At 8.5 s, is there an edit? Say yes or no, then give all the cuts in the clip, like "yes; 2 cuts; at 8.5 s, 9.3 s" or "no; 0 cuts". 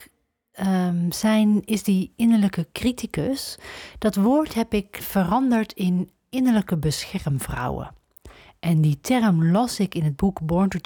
no; 1 cut; at 5.0 s